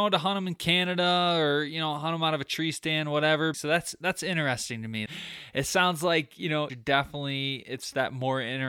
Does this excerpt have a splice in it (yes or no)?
yes